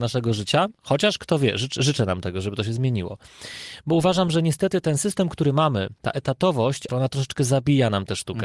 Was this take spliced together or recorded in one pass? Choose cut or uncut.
cut